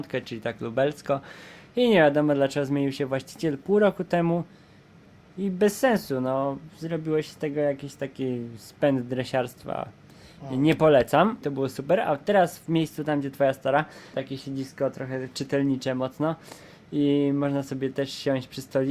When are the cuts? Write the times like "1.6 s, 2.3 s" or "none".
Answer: 11.4 s, 14.1 s